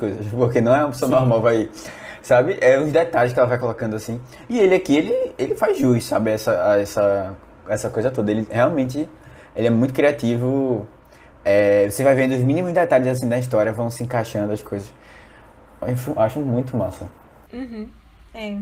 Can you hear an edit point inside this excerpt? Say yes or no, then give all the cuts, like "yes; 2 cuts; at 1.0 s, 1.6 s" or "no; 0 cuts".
no; 0 cuts